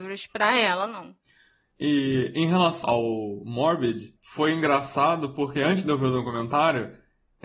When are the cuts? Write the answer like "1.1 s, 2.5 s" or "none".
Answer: 2.8 s